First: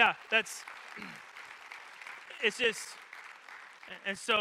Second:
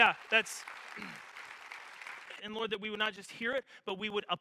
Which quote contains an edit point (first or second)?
second